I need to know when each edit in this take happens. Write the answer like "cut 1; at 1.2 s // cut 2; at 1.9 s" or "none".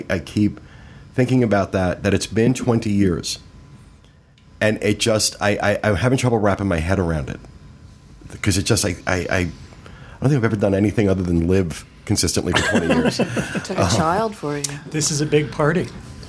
none